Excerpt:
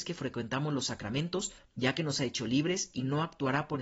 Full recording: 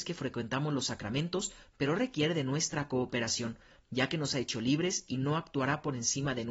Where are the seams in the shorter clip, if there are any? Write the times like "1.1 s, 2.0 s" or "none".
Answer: 1.6 s